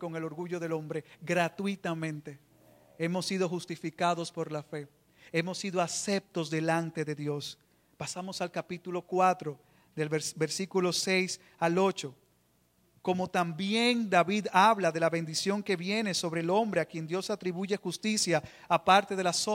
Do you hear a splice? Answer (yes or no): no